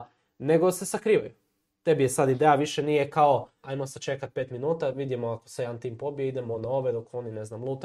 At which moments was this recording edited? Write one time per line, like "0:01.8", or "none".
0:03.6